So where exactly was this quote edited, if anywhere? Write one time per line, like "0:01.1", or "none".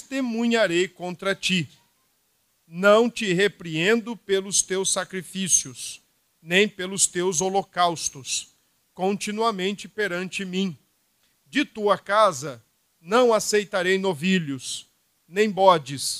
0:02.5